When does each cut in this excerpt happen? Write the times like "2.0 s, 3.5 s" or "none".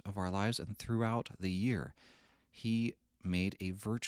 2.4 s

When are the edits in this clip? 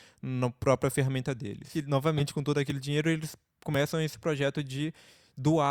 none

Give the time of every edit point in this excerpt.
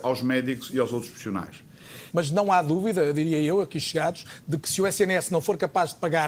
2.1 s

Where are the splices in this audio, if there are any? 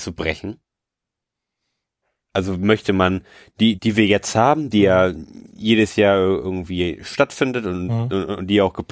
2.2 s, 3.8 s

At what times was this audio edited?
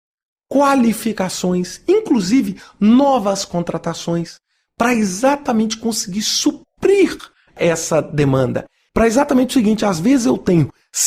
8.9 s

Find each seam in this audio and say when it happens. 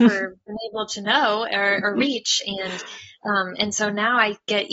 none

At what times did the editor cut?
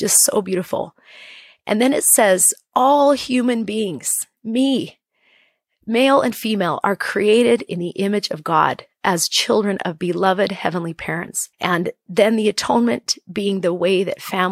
11.5 s

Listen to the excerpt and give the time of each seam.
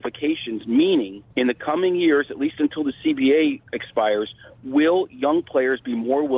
1.3 s

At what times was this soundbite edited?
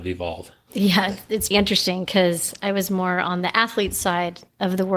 1.5 s

